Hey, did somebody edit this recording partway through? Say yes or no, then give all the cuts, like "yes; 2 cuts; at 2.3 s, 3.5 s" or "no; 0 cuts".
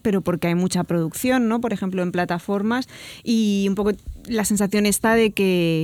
no; 0 cuts